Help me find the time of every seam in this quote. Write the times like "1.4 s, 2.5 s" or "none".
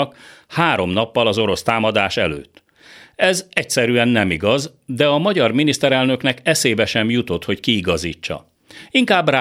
none